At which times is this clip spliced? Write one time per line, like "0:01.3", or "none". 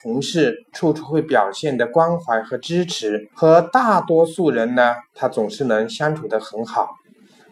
0:03.3